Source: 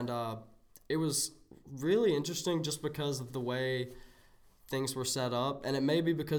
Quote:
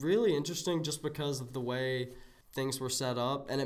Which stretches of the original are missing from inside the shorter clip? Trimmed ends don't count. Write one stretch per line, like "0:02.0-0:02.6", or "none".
0:04.2-0:04.6

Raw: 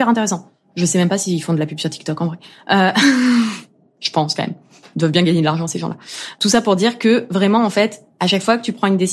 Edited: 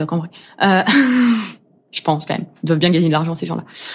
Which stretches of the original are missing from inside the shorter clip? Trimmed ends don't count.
0:04.6-0:04.9

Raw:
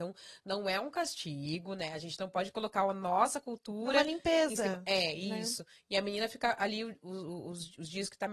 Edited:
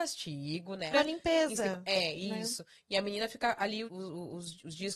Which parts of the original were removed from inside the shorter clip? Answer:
0:01.9-0:03.9
0:06.9-0:07.0

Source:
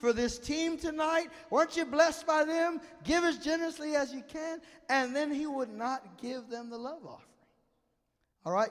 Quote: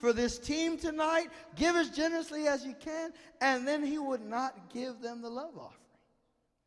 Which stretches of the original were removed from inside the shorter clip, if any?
0:01.5-0:03.0

